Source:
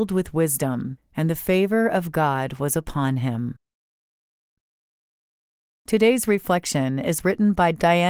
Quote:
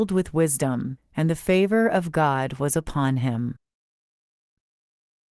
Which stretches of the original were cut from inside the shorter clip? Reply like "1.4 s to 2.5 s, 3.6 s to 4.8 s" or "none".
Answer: none

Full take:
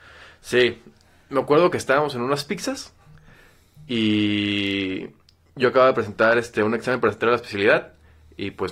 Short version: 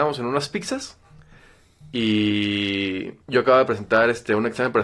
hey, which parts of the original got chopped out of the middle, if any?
5.2 s to 5.5 s

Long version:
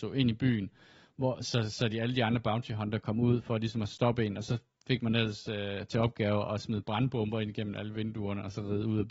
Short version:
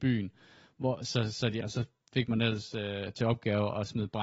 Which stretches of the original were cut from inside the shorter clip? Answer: 2.0 s to 4.3 s

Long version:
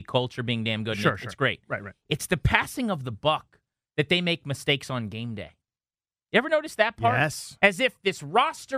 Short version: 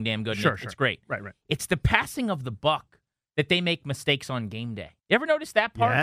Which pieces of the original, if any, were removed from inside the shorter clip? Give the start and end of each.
5.6 s to 6.2 s

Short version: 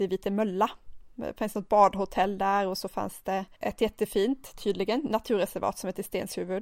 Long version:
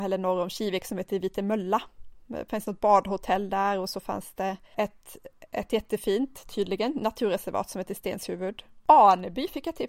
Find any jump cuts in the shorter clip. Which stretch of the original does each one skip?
4.7 s to 5.5 s

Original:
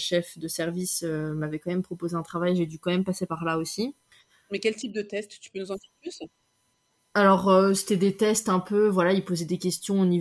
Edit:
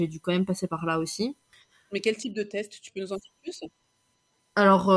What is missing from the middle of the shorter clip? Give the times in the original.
none

